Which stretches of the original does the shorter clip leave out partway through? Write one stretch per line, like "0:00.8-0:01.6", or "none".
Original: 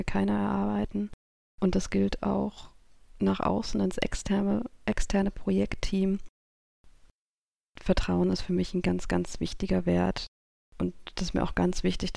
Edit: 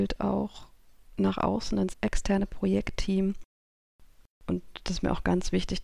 0:03.9-0:04.8
0:07.1-0:10.6

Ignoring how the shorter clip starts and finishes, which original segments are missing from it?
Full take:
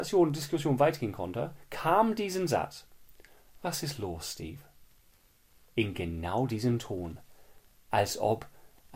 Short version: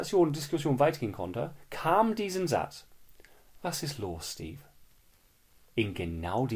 none

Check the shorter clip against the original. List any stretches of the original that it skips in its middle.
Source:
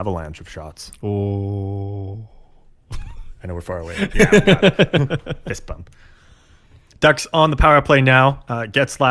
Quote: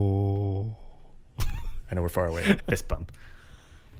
0:04.1-0:05.4

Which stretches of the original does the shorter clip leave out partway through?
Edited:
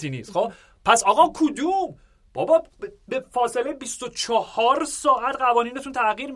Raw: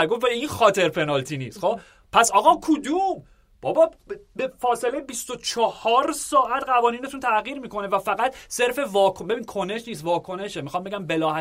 none

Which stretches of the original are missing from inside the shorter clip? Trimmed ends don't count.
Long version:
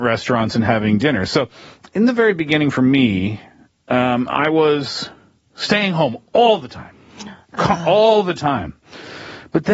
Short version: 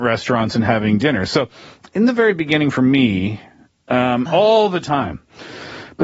0:04.3-0:07.8

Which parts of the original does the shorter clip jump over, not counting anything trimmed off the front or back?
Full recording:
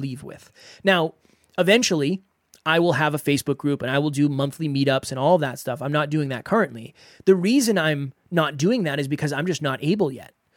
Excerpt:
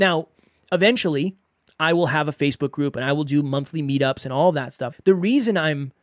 0:05.8-0:07.1

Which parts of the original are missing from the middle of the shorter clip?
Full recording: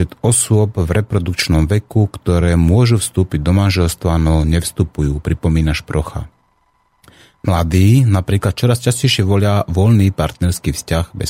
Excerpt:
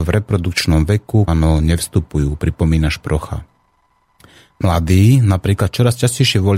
0:02.1-0:04.1

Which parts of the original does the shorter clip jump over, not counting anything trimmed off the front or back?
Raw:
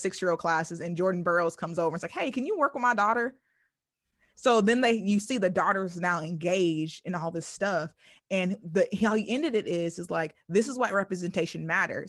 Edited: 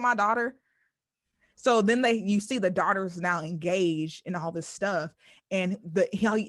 none

